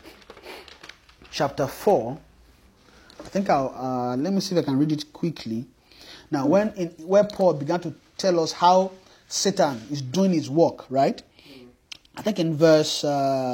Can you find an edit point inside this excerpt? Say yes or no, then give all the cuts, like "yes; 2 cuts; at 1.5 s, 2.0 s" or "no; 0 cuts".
no; 0 cuts